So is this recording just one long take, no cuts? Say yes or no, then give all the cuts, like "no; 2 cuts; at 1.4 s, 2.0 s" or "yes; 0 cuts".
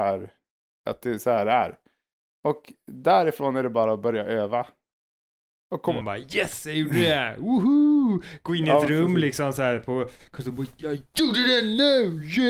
no; 2 cuts; at 6.0 s, 10.8 s